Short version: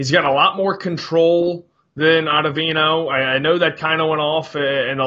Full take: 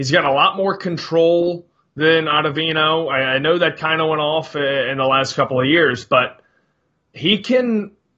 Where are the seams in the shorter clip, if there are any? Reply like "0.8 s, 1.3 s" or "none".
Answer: none